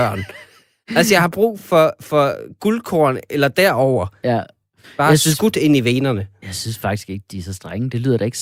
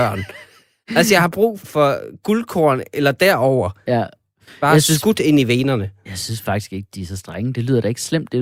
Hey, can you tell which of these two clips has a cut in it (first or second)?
second